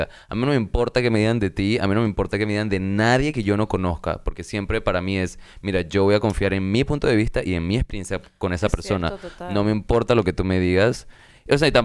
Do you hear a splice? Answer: no; 0 cuts

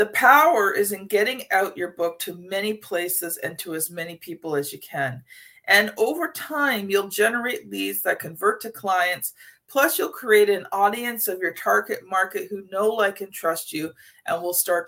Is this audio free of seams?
yes; 0 cuts

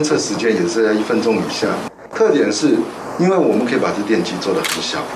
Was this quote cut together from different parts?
yes; 1 cut; at 2.1 s

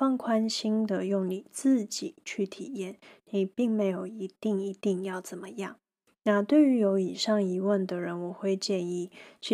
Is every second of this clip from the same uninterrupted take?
yes; 0 cuts

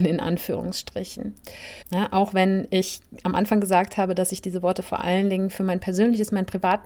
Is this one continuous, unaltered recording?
no; 1 cut; at 1.8 s

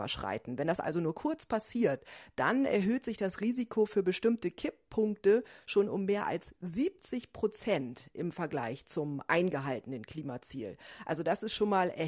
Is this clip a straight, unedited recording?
yes; 0 cuts

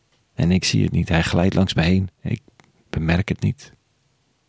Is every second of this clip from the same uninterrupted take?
yes; 0 cuts

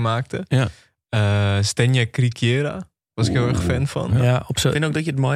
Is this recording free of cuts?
yes; 0 cuts

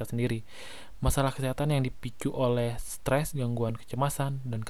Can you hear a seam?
no; 0 cuts

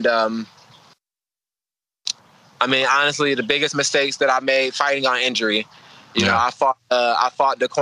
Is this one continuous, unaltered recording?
yes; 0 cuts

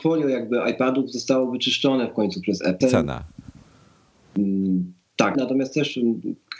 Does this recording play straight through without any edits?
no; 2 cuts; at 2.8 s, 5.3 s

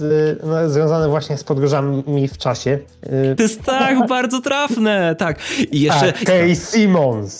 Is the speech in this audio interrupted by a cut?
yes; 2 cuts; at 3.4 s, 6.3 s

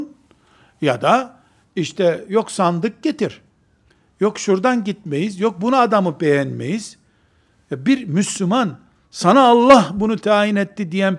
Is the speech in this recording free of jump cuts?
yes; 0 cuts

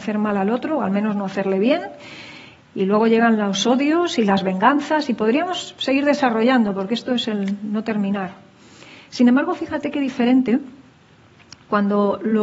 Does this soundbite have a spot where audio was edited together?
no; 0 cuts

